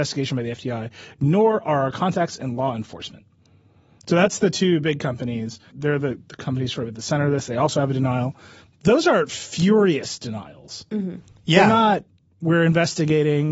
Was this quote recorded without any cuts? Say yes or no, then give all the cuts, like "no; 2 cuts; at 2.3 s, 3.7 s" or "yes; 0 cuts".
no; 1 cut; at 5.7 s